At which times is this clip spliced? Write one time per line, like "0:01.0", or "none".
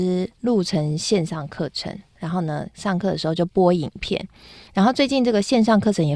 none